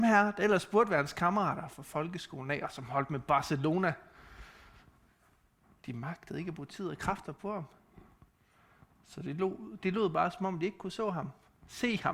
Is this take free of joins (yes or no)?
yes